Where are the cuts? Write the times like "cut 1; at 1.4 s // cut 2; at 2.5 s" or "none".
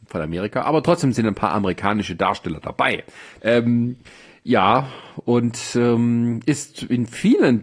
cut 1; at 3.4 s